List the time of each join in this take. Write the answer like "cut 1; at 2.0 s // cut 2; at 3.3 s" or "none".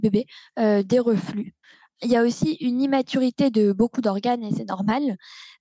none